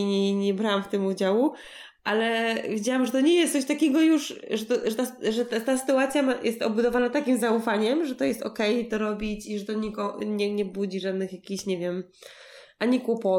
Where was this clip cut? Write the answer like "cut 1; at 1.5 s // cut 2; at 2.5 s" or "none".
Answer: none